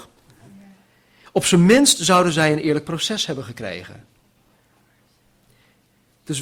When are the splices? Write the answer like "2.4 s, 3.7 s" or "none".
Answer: none